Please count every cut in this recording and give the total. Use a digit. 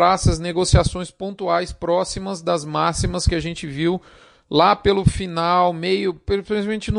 0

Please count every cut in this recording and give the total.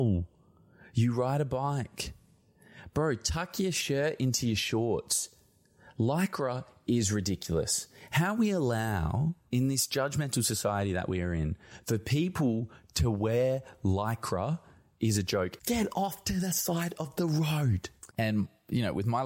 2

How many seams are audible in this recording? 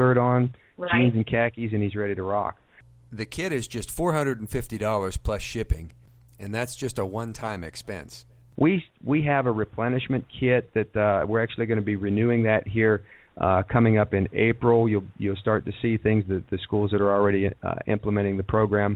0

